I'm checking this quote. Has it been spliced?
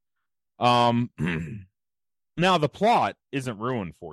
no; 0 cuts

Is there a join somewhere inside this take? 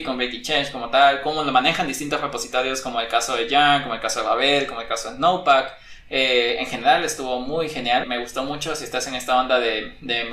yes; 1 cut; at 8.0 s

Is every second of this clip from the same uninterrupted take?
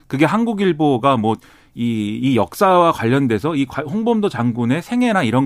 yes; 0 cuts

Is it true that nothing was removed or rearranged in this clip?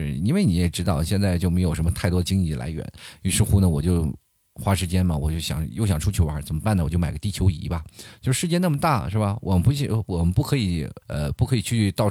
no; 1 cut; at 11.0 s

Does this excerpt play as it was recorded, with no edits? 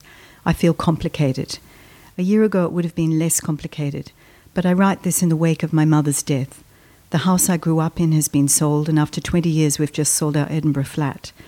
yes; 0 cuts

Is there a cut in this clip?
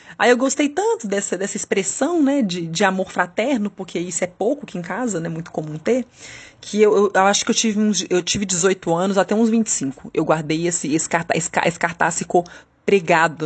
no; 0 cuts

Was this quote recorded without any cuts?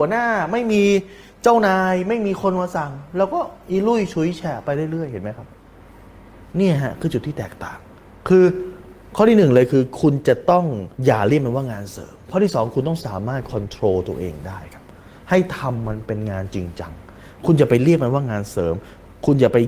no; 1 cut; at 10.9 s

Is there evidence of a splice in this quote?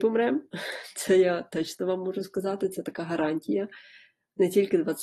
no; 0 cuts

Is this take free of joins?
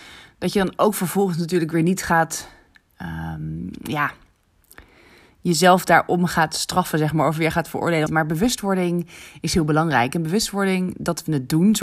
no; 1 cut; at 8.1 s

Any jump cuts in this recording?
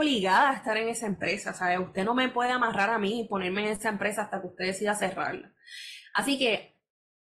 no; 0 cuts

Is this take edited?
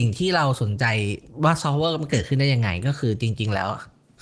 no; 0 cuts

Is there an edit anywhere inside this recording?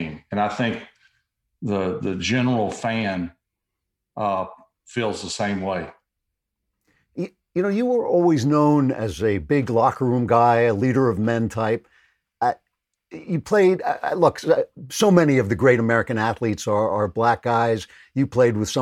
no; 0 cuts

